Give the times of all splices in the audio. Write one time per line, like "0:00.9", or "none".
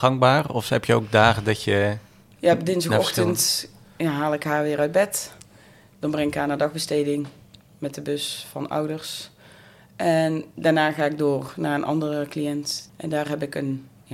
0:12.9